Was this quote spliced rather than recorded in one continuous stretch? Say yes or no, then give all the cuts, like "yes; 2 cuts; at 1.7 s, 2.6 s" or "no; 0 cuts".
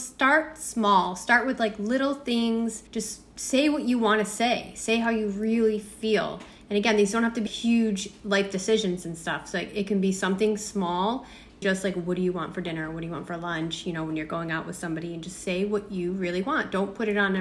yes; 3 cuts; at 2.9 s, 7.5 s, 11.6 s